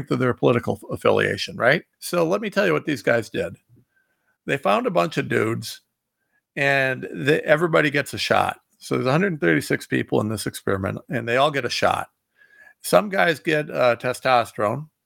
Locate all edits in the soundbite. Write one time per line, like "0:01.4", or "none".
0:01.9